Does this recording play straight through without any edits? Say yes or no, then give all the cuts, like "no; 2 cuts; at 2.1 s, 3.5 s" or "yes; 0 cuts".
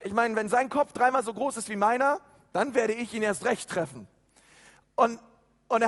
yes; 0 cuts